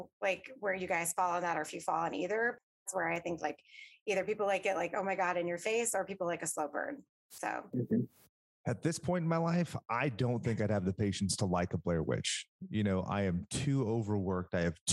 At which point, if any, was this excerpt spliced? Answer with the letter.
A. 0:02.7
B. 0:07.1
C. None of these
C